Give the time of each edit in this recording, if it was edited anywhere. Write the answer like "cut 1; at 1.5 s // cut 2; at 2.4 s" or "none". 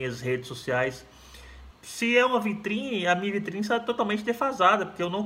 cut 1; at 1.7 s